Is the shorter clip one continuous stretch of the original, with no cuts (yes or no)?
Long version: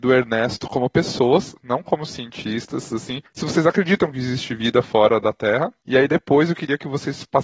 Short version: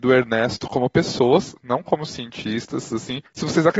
yes